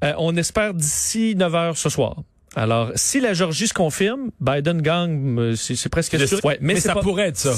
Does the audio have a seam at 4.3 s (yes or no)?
no